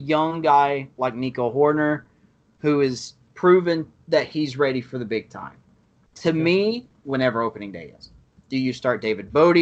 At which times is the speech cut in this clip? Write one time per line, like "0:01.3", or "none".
0:07.0
0:08.4